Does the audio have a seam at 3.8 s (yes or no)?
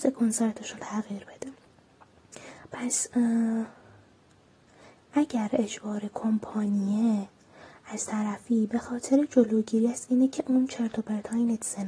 no